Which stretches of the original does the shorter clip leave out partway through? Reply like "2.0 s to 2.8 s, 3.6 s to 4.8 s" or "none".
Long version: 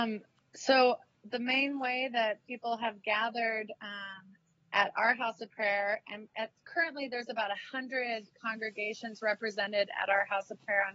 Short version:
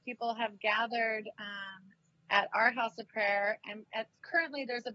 none